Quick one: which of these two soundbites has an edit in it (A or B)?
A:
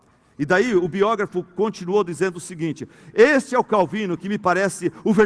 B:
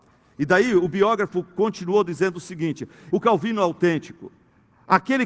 B